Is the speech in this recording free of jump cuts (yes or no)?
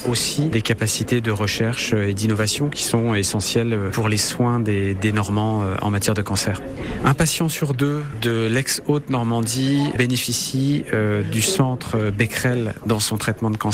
yes